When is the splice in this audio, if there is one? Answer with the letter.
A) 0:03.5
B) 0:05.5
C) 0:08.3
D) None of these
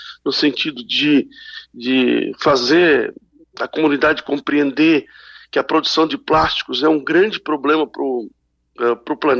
D